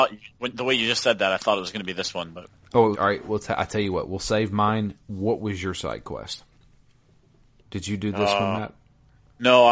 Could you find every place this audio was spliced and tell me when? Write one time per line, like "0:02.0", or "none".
0:02.9
0:07.6

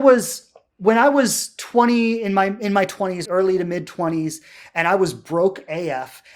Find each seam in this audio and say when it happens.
0:03.2

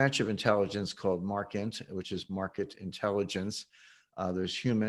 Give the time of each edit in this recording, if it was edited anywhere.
none

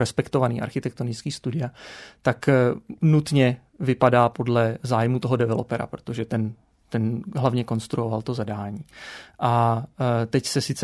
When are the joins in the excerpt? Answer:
none

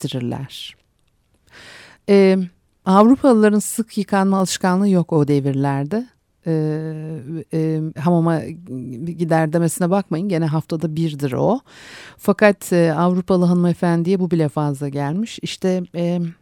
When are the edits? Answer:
0:08.0

